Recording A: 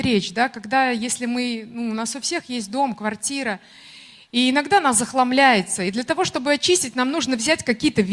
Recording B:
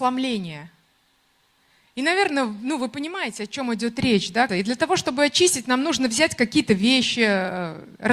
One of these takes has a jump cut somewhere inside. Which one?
B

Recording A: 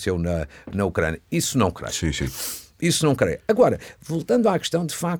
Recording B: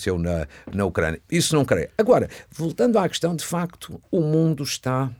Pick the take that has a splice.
B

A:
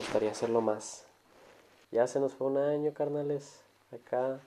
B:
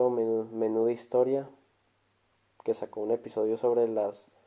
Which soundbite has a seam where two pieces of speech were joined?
A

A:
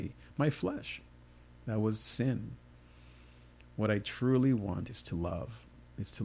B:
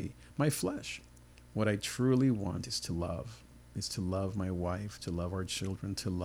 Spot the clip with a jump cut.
B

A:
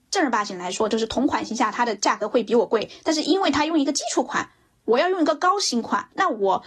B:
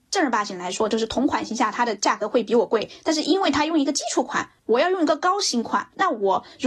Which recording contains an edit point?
B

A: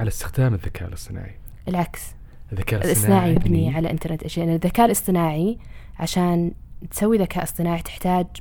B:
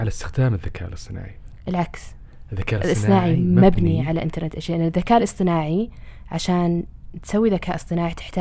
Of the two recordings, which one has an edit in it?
A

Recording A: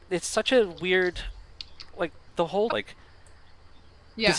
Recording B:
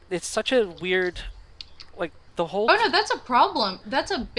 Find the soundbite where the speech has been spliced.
A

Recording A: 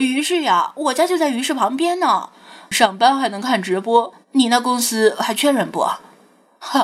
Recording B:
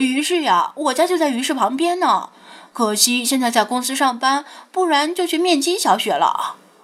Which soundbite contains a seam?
A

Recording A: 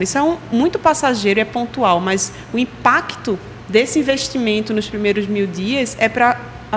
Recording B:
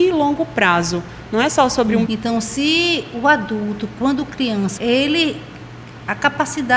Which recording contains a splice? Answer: B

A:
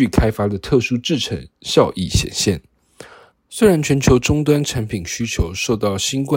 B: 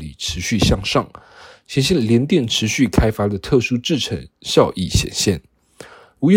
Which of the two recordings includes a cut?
A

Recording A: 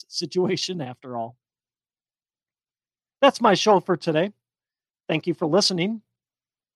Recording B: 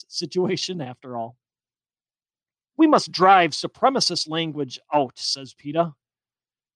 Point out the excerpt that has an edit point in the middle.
B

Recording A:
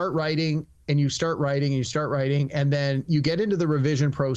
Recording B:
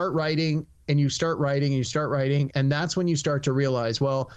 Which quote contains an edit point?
B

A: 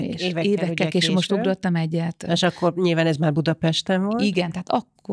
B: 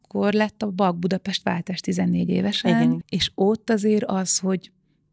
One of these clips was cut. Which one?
B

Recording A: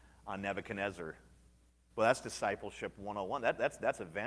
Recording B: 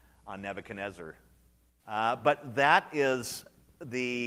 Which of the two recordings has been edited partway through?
B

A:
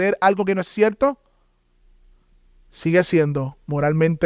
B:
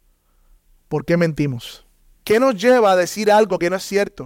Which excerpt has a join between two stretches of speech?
B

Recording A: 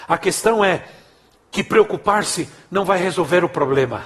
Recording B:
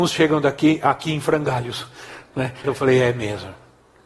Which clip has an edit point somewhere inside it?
B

